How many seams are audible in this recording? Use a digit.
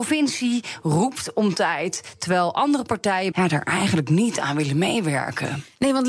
1